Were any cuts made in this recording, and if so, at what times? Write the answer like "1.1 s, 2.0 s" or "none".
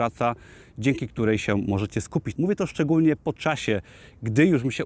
2.3 s